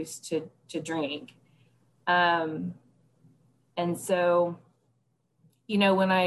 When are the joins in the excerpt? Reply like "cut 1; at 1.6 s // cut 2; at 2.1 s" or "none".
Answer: none